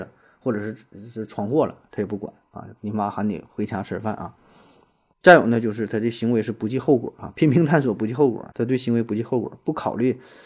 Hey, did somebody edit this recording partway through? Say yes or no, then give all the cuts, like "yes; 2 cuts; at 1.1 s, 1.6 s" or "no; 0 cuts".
yes; 3 cuts; at 2.8 s, 5.1 s, 8.5 s